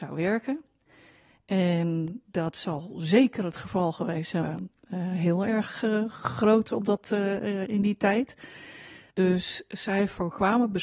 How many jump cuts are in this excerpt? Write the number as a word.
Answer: two